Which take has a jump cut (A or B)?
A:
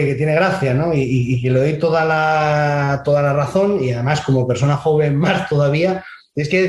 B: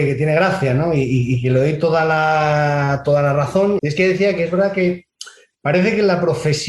B